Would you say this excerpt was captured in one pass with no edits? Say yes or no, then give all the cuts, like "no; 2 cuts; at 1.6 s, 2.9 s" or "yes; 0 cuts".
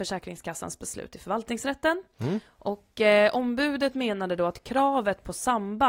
yes; 0 cuts